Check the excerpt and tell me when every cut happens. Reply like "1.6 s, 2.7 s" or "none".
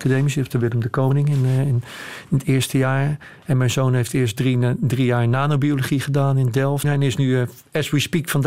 6.8 s